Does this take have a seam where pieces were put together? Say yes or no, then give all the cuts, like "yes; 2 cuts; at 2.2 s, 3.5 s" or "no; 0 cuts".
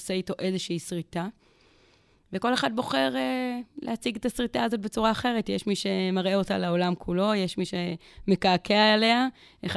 no; 0 cuts